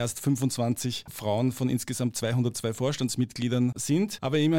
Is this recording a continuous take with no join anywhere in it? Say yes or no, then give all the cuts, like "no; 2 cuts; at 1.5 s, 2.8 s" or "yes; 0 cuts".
yes; 0 cuts